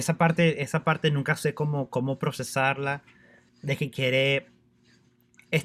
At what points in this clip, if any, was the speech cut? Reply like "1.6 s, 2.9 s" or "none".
3.5 s